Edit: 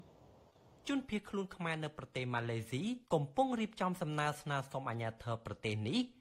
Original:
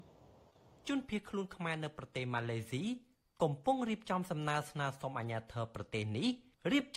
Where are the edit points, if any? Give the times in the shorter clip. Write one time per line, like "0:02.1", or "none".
0:03.0

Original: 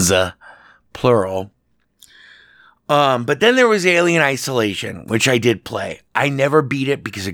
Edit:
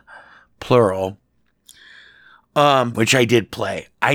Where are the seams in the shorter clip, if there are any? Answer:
0:02.9

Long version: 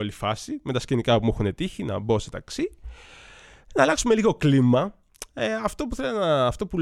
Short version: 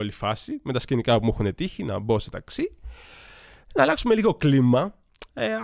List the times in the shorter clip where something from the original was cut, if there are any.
none

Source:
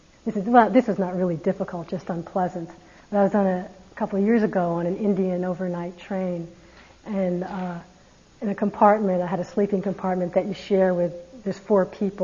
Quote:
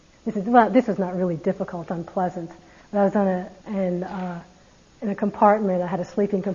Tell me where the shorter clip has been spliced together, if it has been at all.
0:01.9
0:03.6

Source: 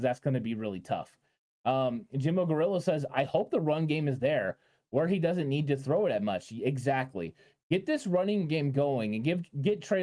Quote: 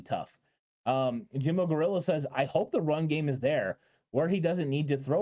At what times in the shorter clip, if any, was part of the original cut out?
none

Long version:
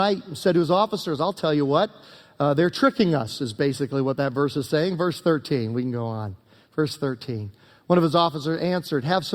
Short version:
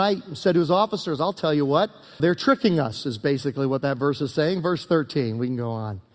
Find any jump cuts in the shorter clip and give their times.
0:02.2

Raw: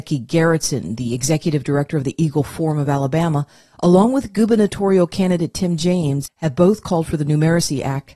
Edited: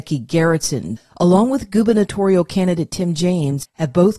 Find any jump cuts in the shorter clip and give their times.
0:01.0

